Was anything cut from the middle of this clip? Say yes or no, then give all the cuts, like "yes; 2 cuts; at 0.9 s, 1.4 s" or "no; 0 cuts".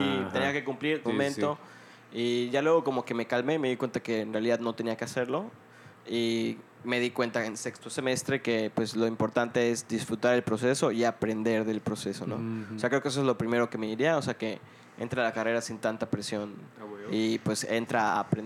yes; 1 cut; at 1.1 s